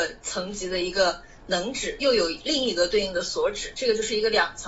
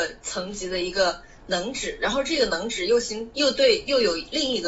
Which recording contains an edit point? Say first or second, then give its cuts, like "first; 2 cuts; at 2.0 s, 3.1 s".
first; 1 cut; at 2.0 s